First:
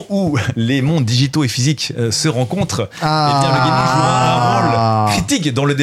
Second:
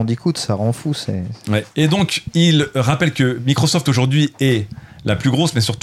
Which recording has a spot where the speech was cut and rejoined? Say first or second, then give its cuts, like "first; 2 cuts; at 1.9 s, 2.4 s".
second; 1 cut; at 1.7 s